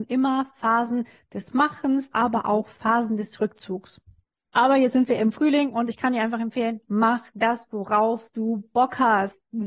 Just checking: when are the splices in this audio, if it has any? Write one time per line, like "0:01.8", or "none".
0:02.1

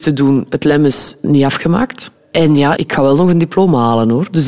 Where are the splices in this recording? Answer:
0:02.8

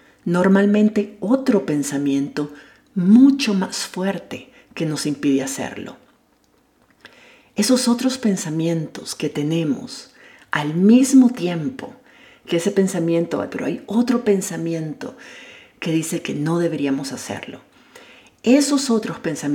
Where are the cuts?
0:13.5

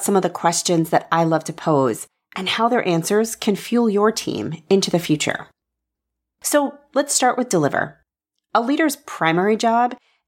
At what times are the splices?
none

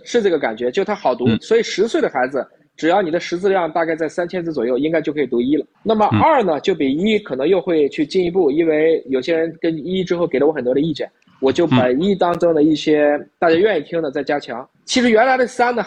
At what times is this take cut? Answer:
0:05.7
0:14.7

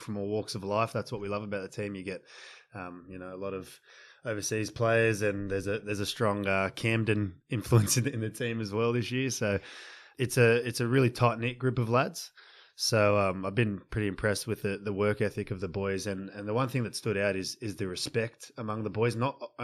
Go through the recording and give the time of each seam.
none

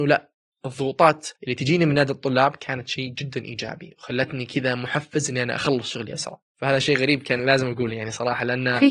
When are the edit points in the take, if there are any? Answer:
0:01.4

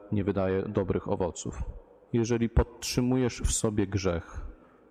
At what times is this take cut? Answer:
0:02.1

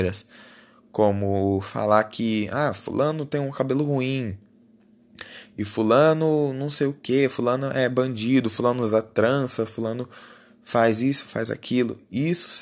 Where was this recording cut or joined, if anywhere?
none

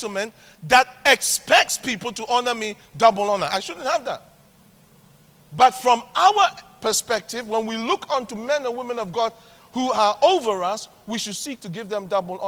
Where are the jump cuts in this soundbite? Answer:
none

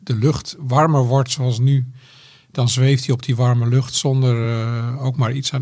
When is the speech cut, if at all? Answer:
none

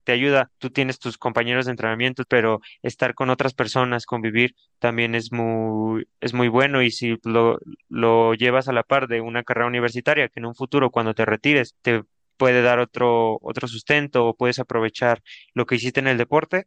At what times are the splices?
0:02.2

